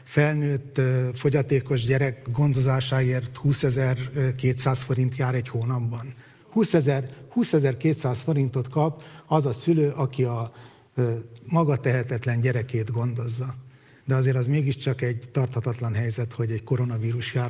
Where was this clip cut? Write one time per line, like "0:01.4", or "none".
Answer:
0:14.0